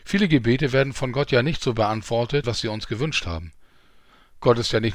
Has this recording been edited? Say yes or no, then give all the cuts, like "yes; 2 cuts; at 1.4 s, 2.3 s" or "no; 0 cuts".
yes; 1 cut; at 2.4 s